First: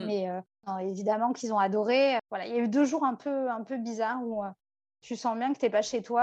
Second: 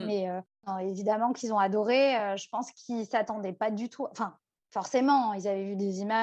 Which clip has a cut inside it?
first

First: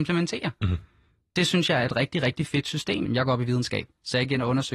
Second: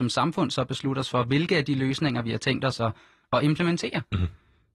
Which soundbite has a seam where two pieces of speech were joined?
first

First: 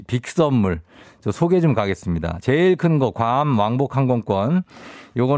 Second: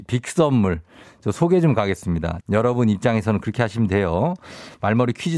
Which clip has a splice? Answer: second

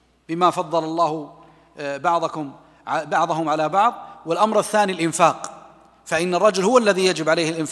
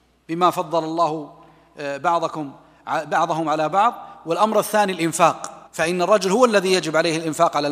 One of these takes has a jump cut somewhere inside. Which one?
second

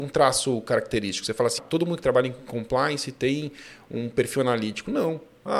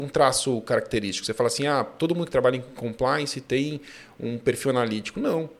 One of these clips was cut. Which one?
first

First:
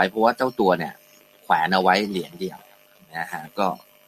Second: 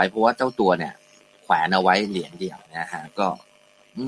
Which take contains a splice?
second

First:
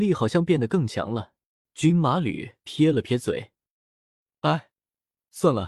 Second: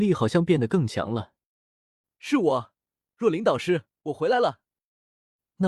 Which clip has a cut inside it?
first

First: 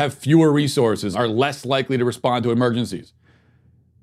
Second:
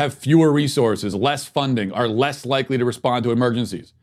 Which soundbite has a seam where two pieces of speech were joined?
first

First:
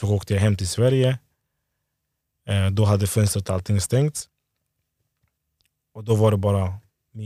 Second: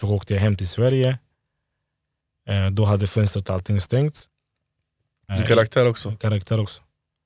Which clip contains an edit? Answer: second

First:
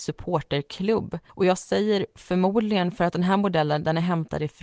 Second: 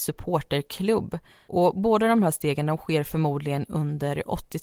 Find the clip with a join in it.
first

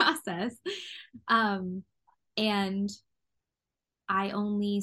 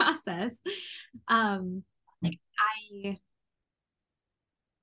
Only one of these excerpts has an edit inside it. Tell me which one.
second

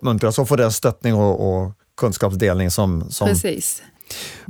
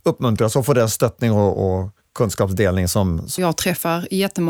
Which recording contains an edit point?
second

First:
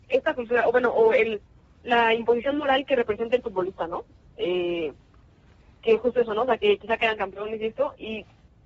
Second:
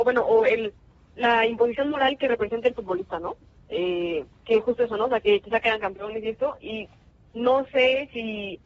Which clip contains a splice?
second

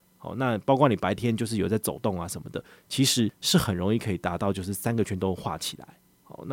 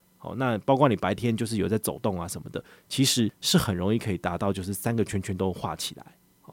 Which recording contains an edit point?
first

